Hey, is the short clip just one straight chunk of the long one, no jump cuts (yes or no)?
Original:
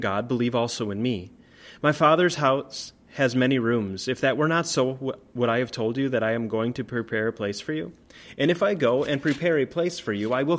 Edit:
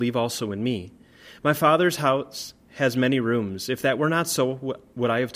yes